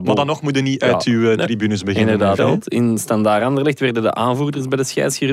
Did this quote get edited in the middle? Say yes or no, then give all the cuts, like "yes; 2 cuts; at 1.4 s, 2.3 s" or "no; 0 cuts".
yes; 1 cut; at 2.4 s